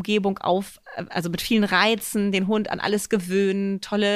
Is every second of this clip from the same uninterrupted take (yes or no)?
yes